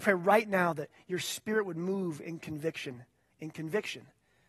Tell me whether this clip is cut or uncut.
cut